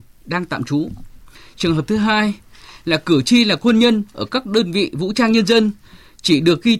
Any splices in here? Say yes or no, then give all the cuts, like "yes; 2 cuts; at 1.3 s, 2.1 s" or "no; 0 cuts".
no; 0 cuts